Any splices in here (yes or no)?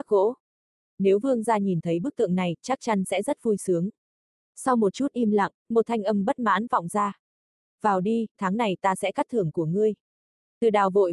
yes